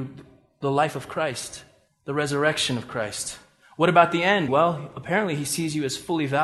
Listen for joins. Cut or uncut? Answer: cut